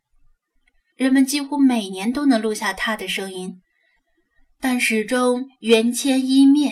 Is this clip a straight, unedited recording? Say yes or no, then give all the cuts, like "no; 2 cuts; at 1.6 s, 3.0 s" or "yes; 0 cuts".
no; 1 cut; at 0.9 s